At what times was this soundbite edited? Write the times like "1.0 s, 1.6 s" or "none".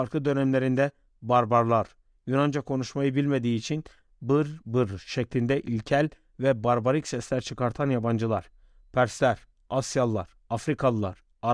4.6 s